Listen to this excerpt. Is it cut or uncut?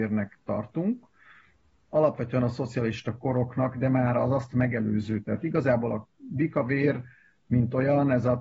uncut